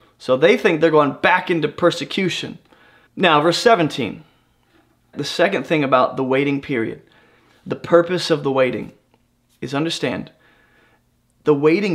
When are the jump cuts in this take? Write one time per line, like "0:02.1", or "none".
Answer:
0:03.1
0:05.1